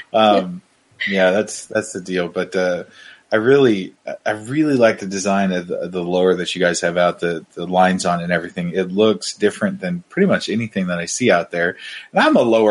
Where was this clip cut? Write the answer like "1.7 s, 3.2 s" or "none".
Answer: none